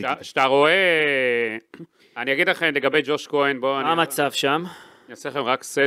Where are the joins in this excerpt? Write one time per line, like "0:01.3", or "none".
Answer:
0:02.0

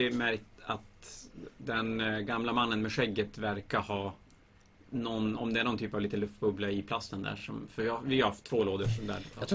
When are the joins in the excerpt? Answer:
none

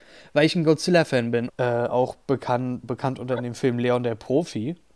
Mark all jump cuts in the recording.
0:01.5
0:02.8

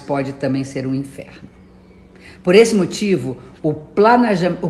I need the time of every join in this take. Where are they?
none

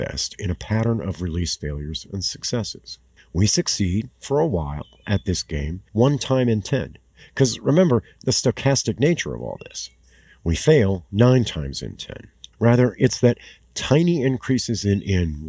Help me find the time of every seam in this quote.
0:05.9
0:12.5

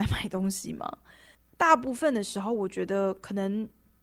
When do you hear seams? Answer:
0:01.3

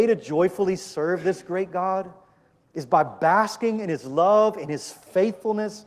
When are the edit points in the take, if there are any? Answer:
none

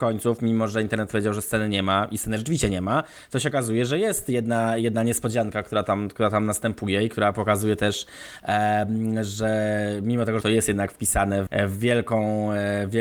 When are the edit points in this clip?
0:10.4
0:11.5

